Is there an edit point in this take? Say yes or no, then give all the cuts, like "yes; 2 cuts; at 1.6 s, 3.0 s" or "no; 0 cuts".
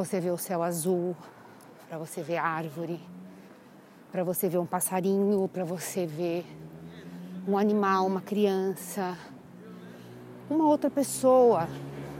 no; 0 cuts